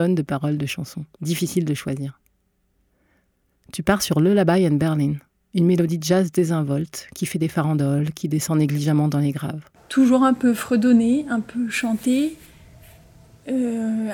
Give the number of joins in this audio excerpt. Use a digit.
2